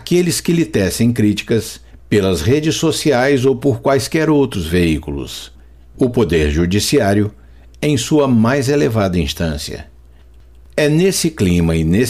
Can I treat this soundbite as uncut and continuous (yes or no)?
yes